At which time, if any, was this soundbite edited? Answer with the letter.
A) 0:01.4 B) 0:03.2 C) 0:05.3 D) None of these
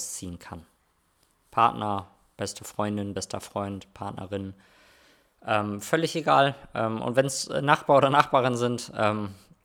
D